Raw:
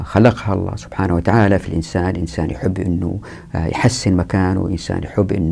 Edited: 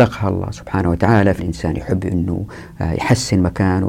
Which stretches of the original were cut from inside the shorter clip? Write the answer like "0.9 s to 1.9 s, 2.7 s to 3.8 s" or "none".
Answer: 1.6 s to 2.1 s